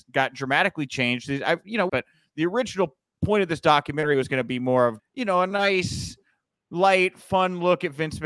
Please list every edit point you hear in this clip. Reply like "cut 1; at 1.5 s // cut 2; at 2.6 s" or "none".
cut 1; at 1.9 s // cut 2; at 5.0 s